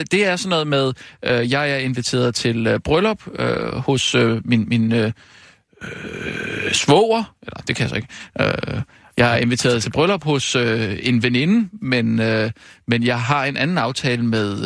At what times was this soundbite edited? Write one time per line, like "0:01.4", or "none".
none